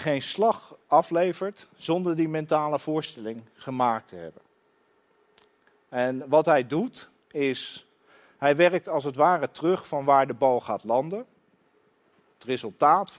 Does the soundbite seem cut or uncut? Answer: uncut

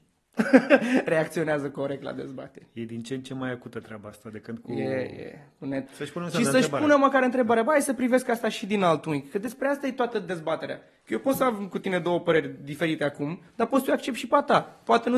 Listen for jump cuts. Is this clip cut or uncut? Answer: cut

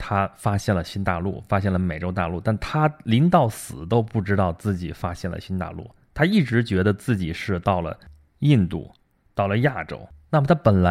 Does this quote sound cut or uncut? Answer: uncut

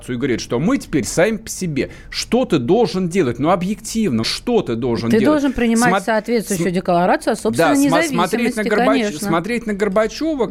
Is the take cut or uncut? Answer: cut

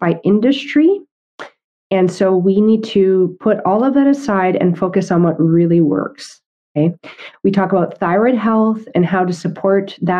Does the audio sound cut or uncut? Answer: uncut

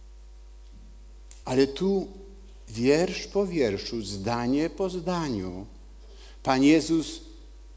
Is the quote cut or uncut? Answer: cut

